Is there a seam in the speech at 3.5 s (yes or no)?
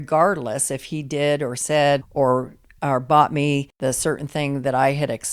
no